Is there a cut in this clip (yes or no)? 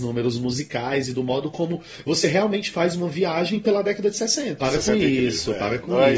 yes